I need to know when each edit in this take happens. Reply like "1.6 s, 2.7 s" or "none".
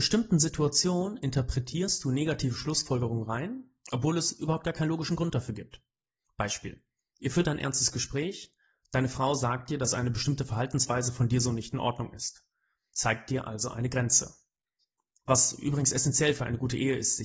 none